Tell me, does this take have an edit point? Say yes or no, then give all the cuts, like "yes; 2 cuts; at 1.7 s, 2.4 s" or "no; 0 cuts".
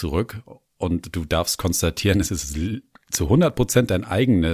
no; 0 cuts